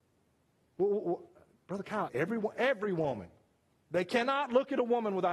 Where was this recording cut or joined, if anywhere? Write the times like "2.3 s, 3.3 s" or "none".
2.1 s